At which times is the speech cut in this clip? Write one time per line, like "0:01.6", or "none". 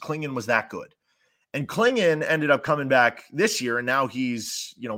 none